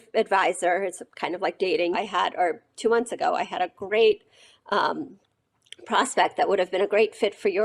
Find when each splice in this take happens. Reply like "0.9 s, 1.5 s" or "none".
1.9 s